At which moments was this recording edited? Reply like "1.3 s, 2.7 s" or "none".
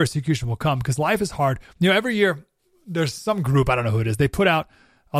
none